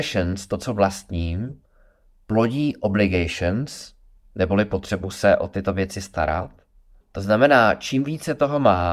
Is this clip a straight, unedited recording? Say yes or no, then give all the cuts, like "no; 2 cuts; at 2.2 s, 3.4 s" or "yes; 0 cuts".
no; 1 cut; at 7.0 s